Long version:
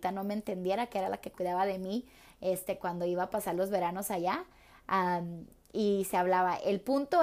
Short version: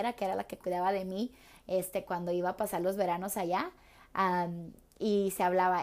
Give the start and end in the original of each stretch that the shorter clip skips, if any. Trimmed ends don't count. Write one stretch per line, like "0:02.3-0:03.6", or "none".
none